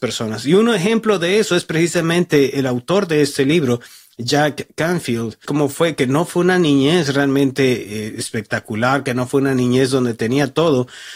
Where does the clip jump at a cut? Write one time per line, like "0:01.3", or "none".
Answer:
0:05.4